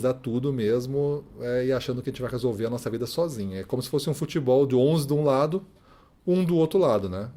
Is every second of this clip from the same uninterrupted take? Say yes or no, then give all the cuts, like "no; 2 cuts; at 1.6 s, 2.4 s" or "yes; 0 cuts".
yes; 0 cuts